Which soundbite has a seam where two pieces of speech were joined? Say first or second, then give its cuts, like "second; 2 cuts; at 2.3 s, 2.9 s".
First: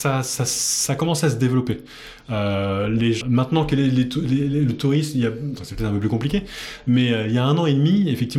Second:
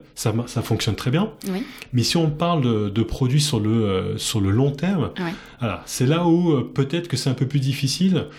first; 2 cuts; at 3.2 s, 5.6 s